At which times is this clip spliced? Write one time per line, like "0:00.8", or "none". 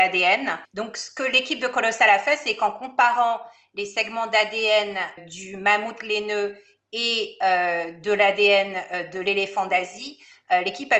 0:05.2